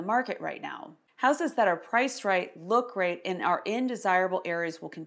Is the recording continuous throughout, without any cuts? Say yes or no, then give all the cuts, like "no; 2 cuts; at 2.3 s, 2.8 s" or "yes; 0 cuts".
yes; 0 cuts